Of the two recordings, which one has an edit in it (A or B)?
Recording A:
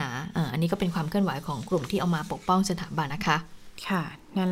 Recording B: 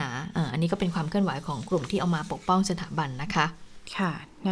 A